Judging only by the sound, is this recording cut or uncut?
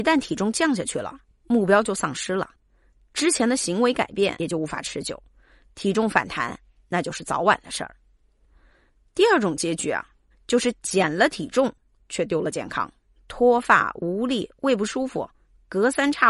cut